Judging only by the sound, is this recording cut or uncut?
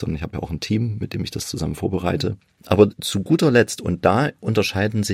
cut